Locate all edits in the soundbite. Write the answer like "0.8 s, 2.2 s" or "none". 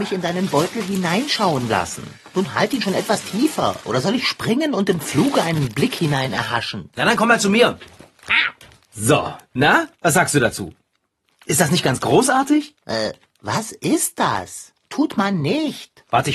14.8 s